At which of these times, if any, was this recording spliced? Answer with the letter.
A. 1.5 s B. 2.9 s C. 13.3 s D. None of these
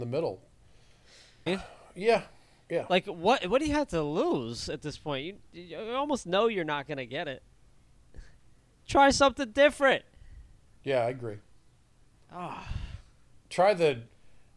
A